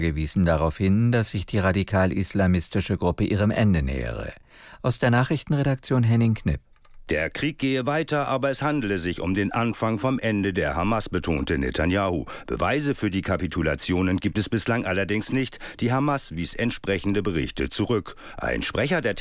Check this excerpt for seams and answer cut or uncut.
uncut